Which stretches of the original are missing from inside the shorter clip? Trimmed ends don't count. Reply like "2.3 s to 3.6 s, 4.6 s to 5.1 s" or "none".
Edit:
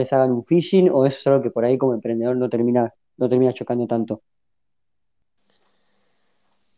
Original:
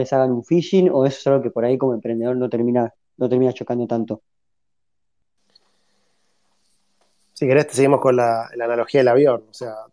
none